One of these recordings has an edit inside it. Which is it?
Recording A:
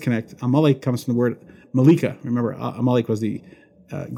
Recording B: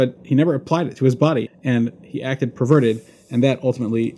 B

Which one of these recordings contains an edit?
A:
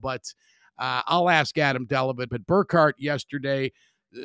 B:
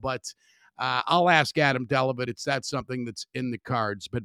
A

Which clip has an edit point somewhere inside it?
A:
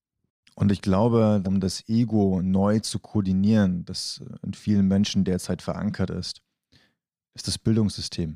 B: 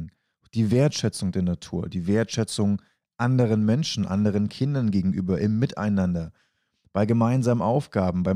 A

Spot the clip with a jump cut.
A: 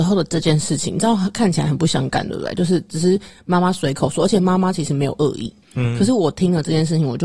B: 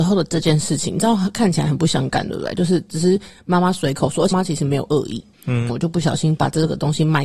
B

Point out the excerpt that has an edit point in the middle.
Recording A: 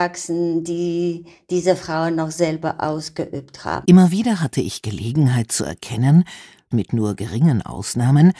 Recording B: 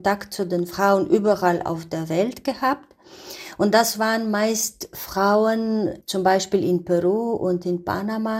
A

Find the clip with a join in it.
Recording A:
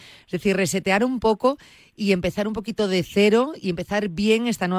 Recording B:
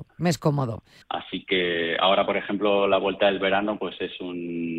B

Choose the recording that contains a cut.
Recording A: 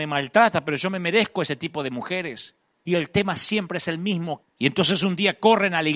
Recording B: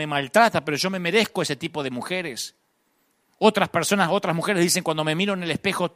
A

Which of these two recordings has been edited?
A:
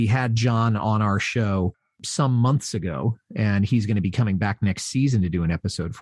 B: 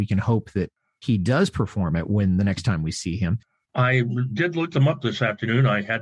B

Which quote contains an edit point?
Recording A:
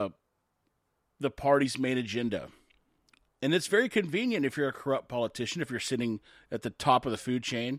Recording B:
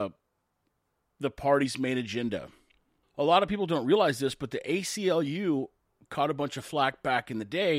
B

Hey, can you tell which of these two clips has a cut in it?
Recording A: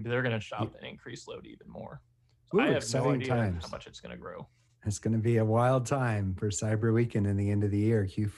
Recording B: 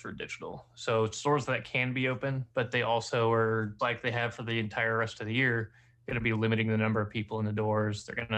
B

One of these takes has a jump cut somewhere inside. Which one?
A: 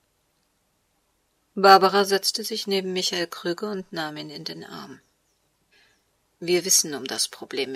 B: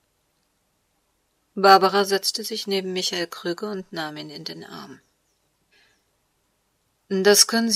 A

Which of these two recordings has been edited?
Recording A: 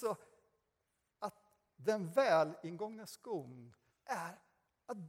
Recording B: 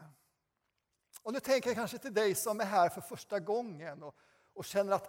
A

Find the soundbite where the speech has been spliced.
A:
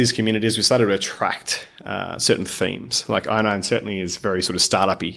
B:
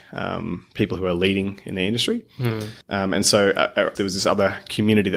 B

